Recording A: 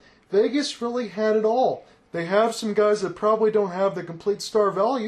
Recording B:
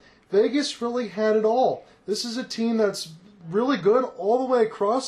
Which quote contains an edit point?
A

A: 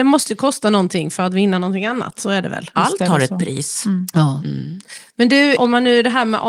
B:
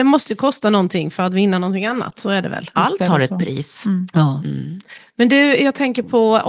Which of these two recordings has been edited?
A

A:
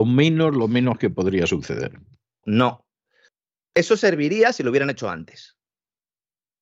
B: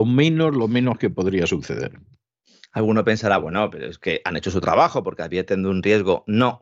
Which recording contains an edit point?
A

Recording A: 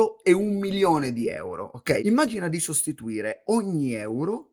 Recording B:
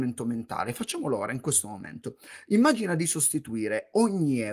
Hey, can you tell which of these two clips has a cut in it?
A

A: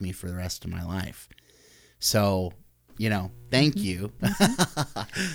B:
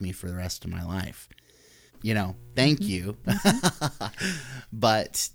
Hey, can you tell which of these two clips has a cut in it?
B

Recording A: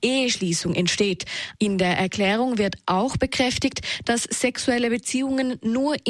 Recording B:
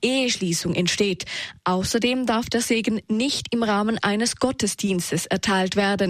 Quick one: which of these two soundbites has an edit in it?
A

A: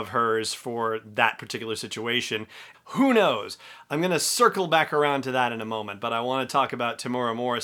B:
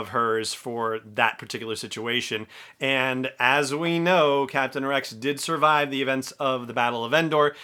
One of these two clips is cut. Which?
A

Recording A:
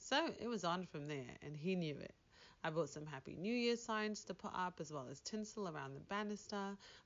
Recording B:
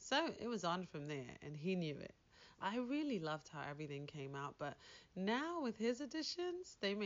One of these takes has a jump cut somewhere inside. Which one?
B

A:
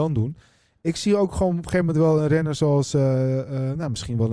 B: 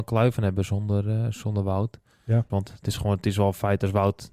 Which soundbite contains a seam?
B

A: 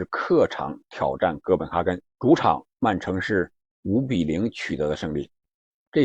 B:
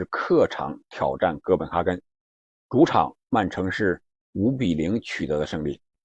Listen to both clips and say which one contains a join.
A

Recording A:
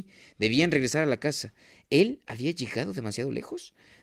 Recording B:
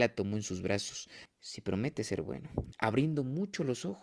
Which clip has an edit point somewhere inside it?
B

